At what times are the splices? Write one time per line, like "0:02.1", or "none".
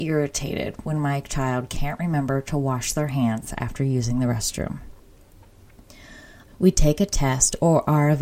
0:06.5